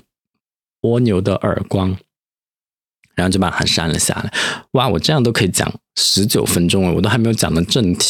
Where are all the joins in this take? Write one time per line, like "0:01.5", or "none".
none